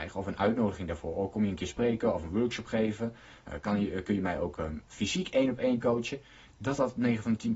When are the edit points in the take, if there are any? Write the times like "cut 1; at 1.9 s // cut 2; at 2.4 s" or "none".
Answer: none